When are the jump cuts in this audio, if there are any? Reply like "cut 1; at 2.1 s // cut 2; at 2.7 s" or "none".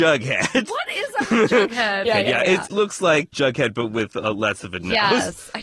cut 1; at 2.0 s